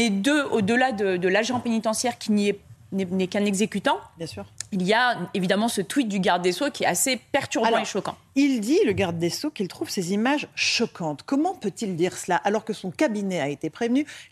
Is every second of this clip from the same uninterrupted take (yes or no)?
yes